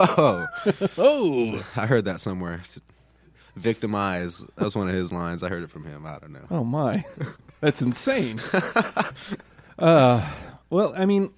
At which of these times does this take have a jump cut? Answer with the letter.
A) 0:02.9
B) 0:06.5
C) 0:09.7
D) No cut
D